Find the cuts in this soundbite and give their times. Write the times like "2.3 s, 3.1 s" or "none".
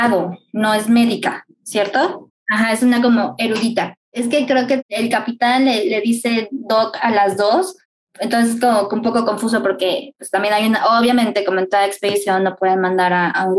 2.3 s